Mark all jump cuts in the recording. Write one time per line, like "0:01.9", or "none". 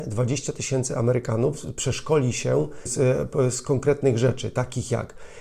0:02.9